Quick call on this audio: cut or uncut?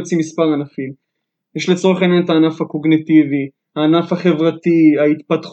uncut